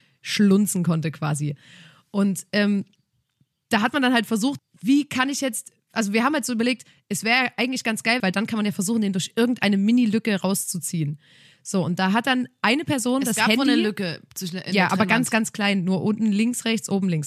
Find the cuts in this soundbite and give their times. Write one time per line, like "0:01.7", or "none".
0:04.6
0:08.2